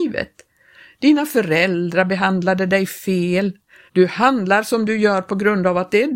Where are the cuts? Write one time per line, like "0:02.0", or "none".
0:03.9